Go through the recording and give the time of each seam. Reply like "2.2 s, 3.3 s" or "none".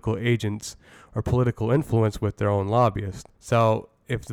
3.3 s